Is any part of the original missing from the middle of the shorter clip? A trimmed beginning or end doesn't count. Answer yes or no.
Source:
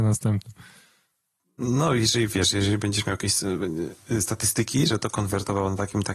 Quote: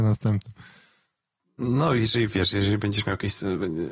no